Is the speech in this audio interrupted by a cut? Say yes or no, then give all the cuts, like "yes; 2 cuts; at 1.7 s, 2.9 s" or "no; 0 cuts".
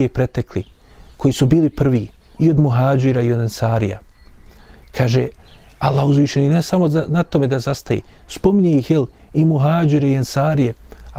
no; 0 cuts